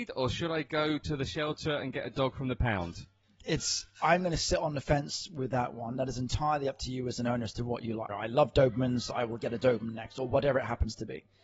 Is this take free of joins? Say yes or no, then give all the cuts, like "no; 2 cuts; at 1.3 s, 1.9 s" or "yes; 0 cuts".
no; 1 cut; at 8.1 s